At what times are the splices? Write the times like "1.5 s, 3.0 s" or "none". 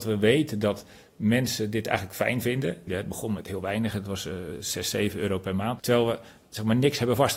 2.9 s, 5.8 s